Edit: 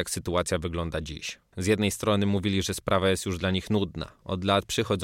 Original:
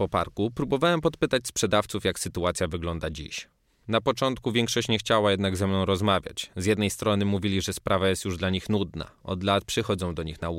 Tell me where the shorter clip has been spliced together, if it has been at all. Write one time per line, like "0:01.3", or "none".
0:01.5